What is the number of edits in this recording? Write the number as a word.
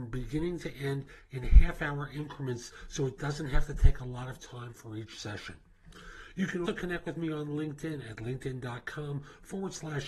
one